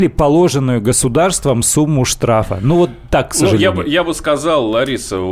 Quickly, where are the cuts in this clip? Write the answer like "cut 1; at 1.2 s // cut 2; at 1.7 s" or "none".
none